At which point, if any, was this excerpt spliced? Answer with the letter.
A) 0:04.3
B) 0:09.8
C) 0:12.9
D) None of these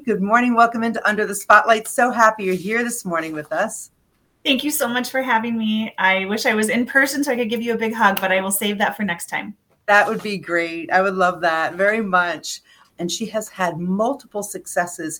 C